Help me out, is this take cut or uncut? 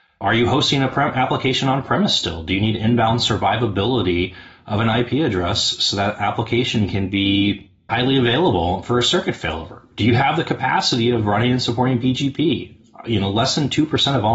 uncut